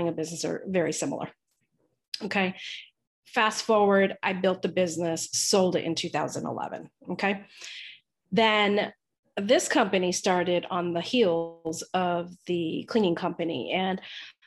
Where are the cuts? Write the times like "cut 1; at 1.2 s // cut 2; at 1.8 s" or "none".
none